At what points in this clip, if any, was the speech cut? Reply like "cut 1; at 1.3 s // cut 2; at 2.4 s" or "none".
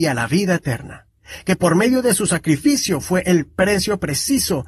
none